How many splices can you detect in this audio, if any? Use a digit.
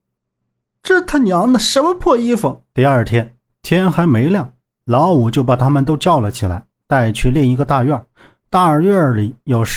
1